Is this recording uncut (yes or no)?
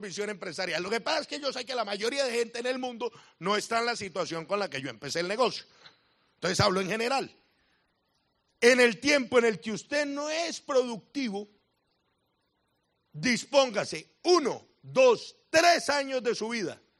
no